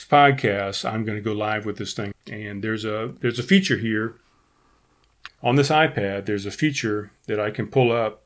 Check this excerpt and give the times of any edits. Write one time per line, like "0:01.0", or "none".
0:02.1
0:05.3